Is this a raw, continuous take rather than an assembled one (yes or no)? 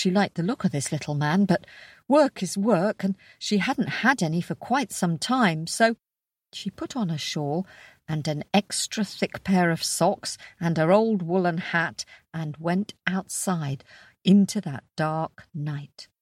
yes